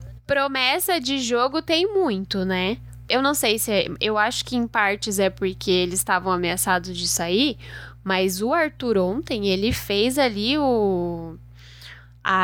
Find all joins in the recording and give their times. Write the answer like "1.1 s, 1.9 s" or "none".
3.1 s